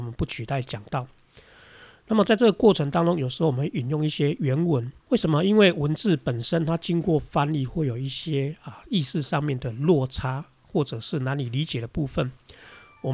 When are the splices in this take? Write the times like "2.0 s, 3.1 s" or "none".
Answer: 5.0 s